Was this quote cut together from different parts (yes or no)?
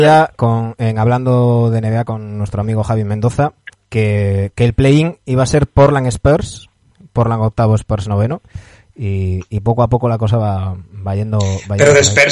no